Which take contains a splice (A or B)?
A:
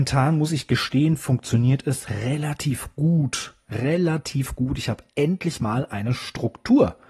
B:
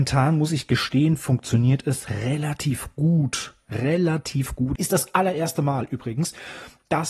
B